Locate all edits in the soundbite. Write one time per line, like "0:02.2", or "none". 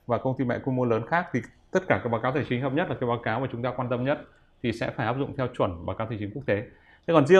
none